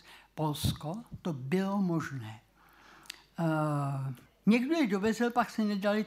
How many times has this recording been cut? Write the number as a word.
one